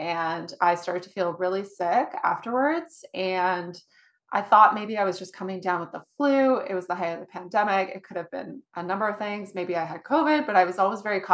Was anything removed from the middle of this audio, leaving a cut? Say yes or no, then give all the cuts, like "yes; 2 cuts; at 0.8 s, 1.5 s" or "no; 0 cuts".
no; 0 cuts